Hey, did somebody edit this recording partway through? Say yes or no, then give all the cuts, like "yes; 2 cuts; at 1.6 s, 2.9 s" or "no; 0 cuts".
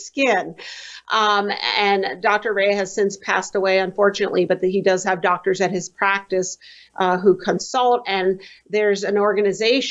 no; 0 cuts